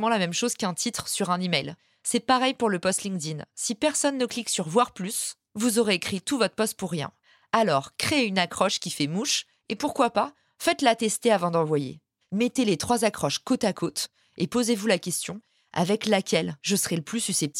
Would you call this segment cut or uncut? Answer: cut